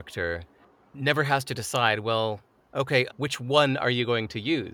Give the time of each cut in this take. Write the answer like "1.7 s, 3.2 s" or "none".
3.1 s